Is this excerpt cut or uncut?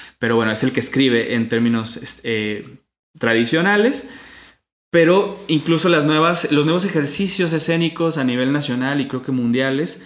uncut